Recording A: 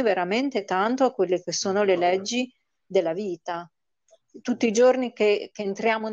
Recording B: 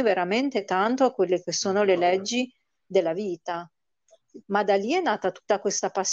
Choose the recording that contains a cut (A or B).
B